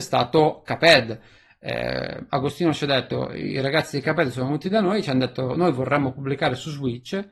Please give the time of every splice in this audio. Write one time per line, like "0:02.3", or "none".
none